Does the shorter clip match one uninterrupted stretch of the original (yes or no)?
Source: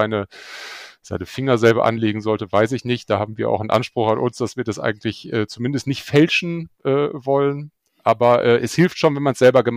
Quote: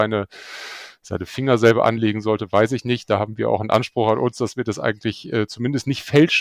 yes